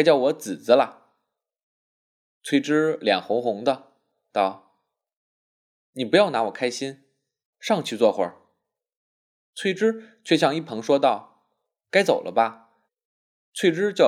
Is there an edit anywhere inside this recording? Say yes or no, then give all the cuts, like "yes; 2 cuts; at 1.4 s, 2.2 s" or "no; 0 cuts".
yes; 3 cuts; at 4.3 s, 7.5 s, 12.9 s